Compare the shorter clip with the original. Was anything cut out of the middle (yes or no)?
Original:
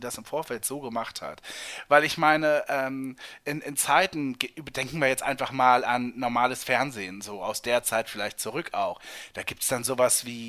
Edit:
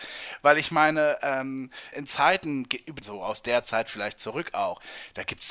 yes